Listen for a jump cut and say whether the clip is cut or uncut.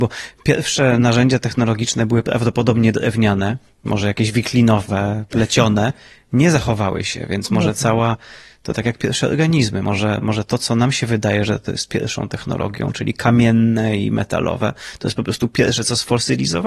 uncut